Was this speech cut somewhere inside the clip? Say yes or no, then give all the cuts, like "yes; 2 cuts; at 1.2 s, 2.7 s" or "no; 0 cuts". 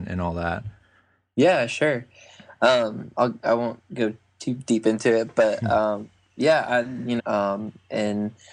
yes; 1 cut; at 7.2 s